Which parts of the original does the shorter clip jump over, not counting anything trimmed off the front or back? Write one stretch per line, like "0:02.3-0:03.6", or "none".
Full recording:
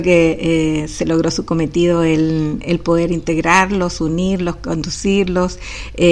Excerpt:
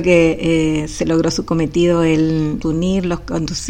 0:02.6-0:04.0